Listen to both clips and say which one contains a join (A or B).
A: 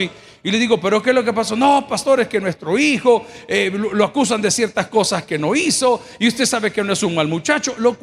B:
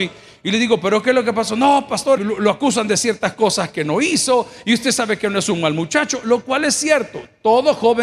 B